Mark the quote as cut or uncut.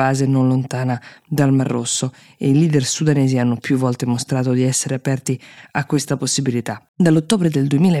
cut